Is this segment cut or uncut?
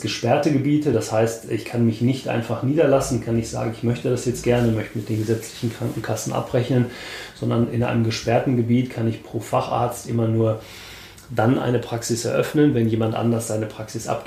uncut